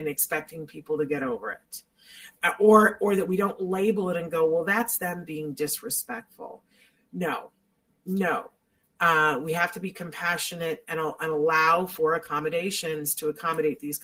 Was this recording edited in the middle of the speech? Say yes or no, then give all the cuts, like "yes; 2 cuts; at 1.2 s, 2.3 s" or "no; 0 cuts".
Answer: no; 0 cuts